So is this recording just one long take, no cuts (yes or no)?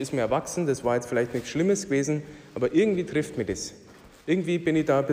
yes